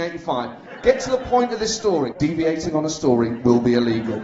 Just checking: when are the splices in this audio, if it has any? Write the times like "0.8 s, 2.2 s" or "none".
2.1 s